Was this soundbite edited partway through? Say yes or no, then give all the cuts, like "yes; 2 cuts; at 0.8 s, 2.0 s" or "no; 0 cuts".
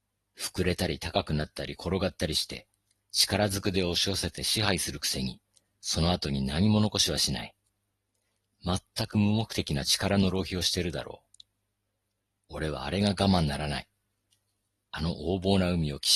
no; 0 cuts